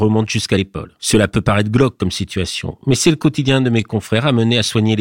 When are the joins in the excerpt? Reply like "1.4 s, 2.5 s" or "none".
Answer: 1.0 s